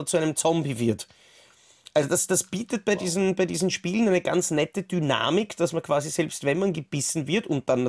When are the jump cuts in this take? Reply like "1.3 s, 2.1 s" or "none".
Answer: none